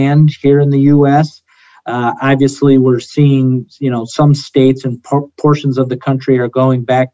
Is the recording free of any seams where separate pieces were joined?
yes; 0 cuts

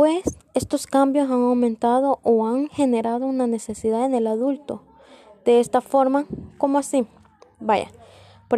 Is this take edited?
no; 0 cuts

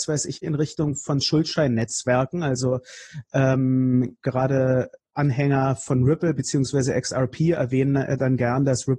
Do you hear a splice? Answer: no; 0 cuts

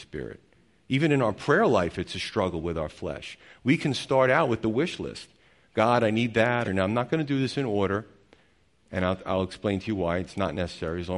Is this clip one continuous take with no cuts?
no; 1 cut; at 6.6 s

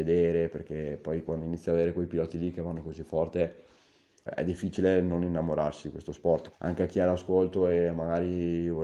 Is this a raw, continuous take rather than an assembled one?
no; 2 cuts; at 4.3 s, 6.5 s

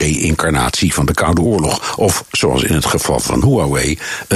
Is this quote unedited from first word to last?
yes; 0 cuts

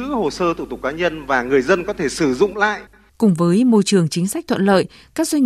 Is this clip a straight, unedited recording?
no; 1 cut; at 3.1 s

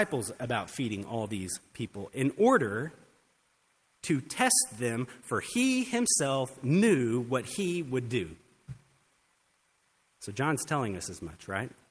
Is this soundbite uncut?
yes; 0 cuts

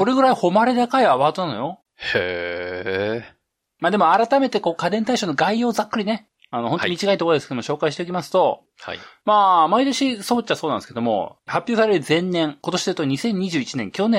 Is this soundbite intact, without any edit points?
yes; 0 cuts

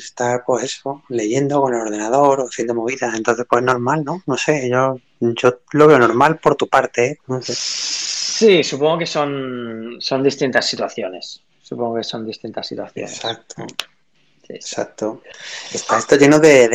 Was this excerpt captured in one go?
no; 1 cut; at 7.2 s

